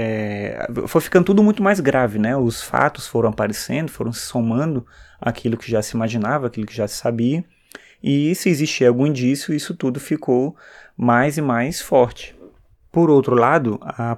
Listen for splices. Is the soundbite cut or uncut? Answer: uncut